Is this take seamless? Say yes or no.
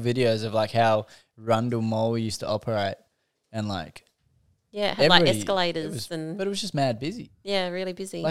yes